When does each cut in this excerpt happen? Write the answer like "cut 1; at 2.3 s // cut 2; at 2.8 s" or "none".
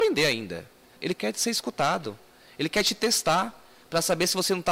cut 1; at 1.0 s